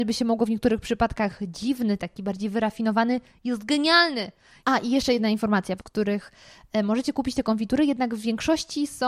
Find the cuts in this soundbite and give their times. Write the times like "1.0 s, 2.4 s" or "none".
4.6 s, 5.8 s

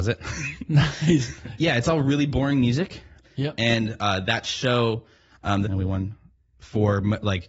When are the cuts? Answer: 1.6 s, 3.2 s, 5.6 s

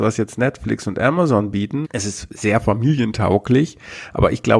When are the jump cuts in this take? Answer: 1.8 s

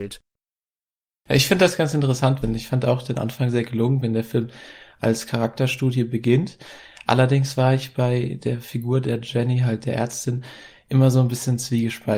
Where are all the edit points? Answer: 2.4 s

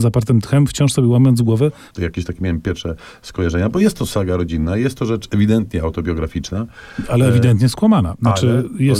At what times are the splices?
1.9 s

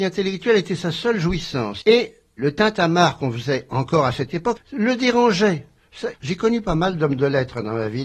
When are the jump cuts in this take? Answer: 1.8 s, 4.6 s, 6.1 s

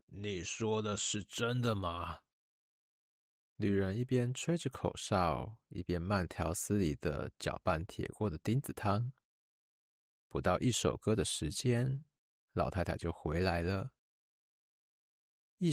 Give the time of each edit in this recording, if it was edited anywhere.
3.4 s

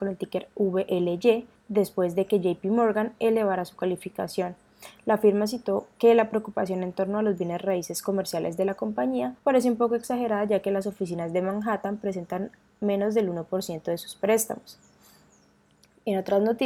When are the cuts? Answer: 1.5 s, 9.4 s

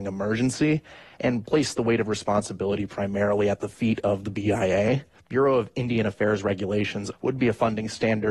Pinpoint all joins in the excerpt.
5.2 s, 7.1 s

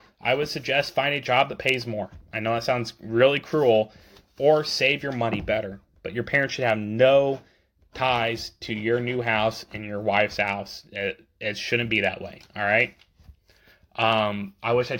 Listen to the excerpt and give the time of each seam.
none

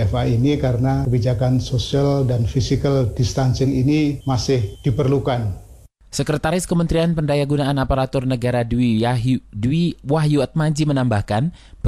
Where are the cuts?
none

